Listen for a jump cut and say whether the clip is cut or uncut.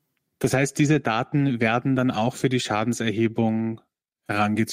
uncut